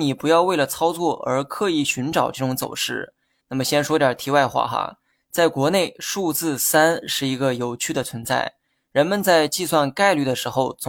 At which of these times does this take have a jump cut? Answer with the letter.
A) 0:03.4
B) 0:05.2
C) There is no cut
A